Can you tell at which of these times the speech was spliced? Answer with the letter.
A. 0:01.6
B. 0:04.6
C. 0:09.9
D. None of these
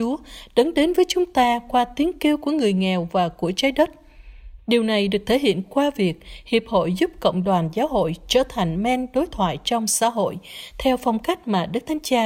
B